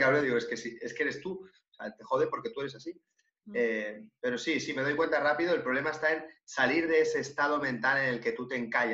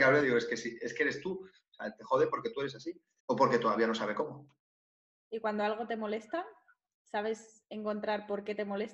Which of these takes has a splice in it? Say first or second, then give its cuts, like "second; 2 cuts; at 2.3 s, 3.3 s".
second; 1 cut; at 3.2 s